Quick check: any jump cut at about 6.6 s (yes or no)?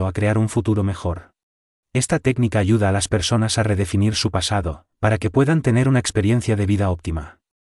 no